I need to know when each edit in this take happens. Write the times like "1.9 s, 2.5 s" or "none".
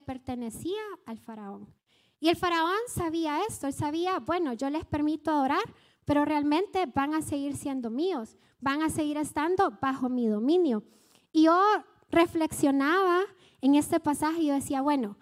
none